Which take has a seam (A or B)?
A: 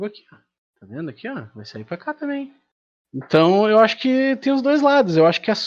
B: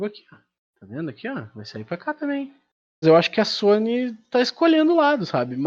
B